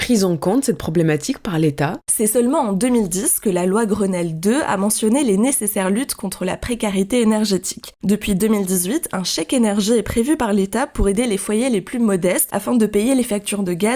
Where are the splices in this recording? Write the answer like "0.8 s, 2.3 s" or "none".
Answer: none